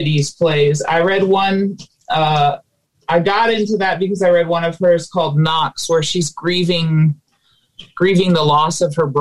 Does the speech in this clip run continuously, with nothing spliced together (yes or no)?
yes